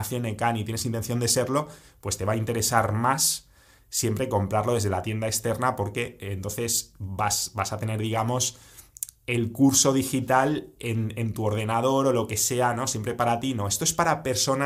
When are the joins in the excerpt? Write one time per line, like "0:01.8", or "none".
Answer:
none